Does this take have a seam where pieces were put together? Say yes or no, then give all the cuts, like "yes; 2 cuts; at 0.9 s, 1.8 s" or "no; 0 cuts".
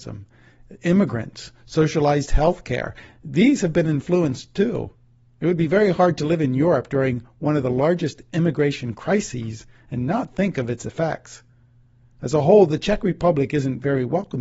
no; 0 cuts